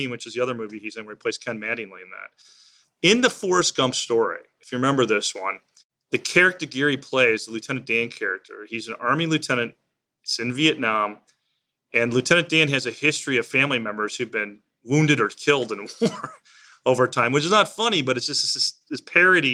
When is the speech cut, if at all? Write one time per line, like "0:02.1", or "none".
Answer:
none